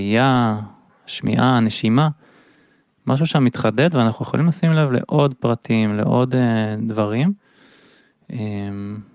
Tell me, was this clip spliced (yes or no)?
no